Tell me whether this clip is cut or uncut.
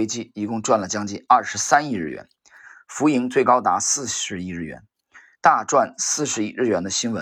cut